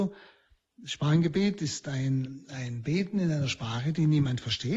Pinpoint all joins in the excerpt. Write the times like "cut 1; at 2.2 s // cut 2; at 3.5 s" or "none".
none